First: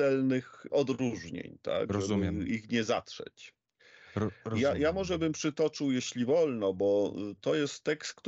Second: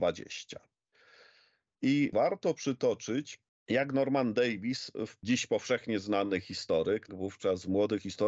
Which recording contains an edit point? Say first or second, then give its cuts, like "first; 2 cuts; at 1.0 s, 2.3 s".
second; 1 cut; at 7.1 s